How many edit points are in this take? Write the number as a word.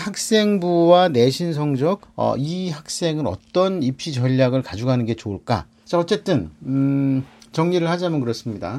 two